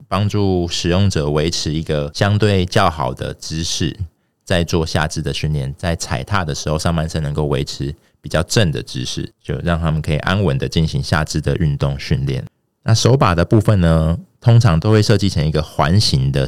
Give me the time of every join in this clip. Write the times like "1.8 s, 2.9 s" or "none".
none